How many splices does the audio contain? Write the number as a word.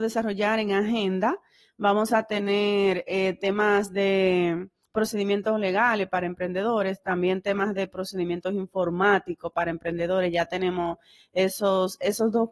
zero